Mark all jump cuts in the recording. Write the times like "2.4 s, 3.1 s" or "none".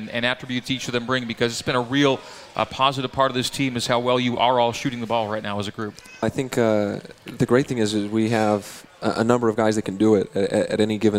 6.2 s